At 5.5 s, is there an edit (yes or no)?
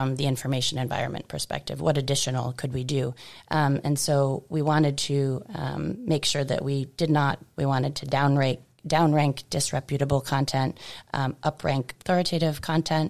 no